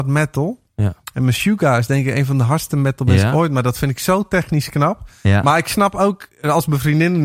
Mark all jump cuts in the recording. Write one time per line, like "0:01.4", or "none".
none